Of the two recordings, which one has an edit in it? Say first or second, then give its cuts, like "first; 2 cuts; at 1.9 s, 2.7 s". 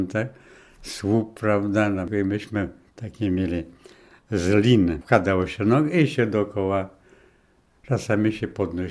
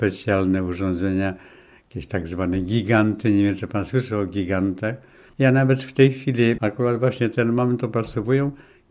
second; 2 cuts; at 5.3 s, 6.6 s